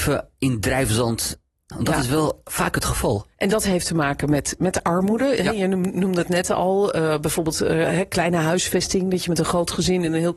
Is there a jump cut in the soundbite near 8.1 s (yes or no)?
no